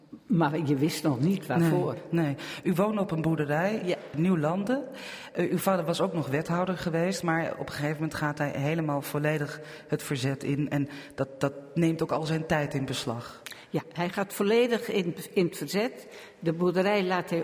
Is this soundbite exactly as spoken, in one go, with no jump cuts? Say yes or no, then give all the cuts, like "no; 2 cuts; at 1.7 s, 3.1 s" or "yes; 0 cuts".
yes; 0 cuts